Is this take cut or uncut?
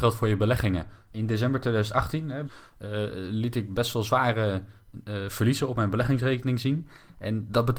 cut